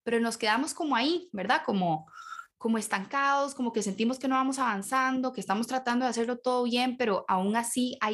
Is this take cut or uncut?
uncut